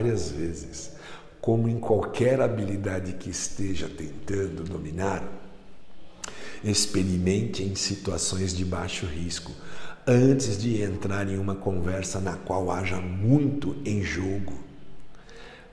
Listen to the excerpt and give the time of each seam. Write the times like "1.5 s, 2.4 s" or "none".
none